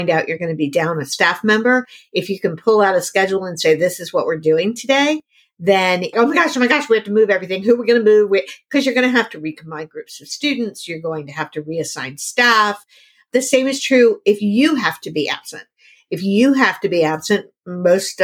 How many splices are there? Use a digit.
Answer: 1